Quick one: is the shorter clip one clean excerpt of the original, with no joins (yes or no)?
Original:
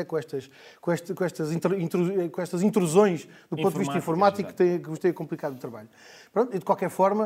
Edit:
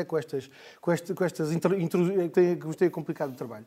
no